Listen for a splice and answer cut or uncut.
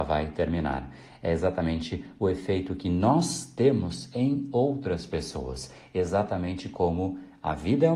uncut